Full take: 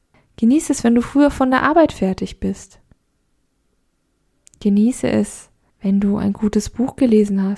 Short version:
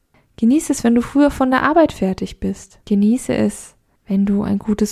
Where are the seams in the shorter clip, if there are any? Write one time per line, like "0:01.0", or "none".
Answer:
0:02.8